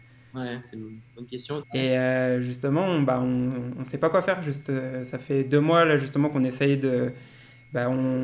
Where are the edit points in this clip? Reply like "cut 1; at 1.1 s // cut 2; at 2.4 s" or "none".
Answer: cut 1; at 1.6 s